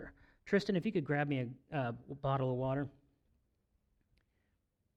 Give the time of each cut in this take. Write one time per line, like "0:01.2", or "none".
none